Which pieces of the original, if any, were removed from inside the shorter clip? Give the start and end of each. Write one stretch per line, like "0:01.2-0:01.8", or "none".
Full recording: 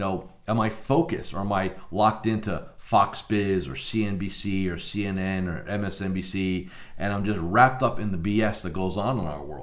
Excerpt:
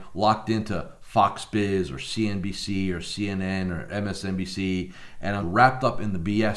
0:07.2-0:07.4